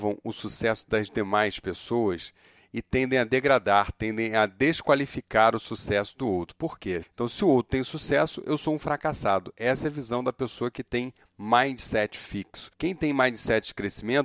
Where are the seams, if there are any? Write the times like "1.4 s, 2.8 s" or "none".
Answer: 7.0 s